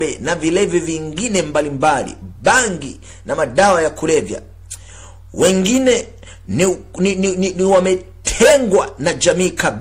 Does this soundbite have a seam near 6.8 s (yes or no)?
no